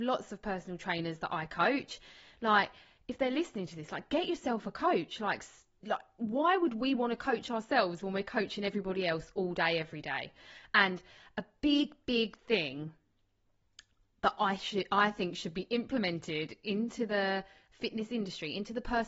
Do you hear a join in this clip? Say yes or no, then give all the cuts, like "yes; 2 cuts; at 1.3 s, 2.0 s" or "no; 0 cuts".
no; 0 cuts